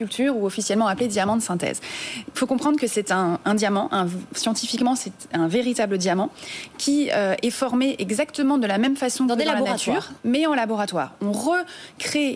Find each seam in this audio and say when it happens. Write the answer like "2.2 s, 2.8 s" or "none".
none